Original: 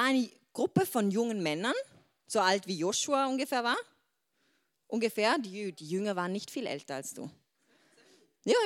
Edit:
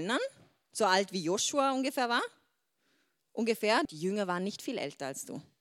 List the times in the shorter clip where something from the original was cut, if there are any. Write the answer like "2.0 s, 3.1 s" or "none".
3.9 s